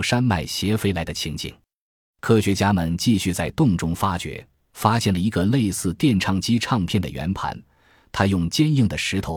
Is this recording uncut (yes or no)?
yes